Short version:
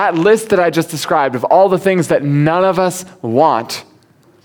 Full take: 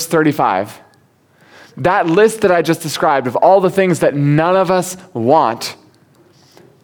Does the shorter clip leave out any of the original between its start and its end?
no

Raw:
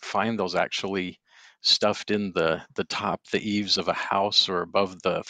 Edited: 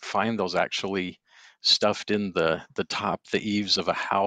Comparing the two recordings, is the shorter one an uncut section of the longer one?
yes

